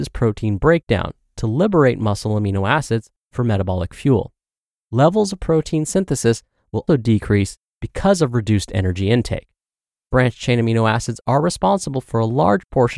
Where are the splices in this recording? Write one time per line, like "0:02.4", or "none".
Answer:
0:06.9
0:10.1